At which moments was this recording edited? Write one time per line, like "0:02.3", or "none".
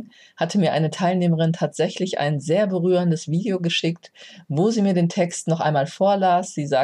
none